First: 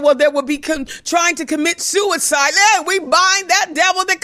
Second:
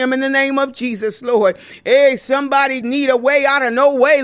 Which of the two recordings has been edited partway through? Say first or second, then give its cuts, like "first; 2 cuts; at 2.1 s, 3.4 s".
second; 1 cut; at 2.8 s